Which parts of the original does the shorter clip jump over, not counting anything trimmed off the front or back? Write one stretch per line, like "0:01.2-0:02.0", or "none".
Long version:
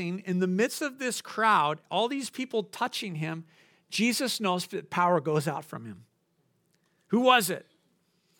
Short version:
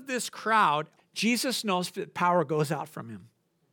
0:01.9-0:03.7